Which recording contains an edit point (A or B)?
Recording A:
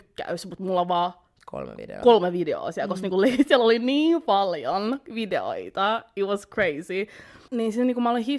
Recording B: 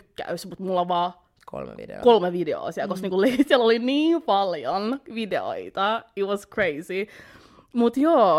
A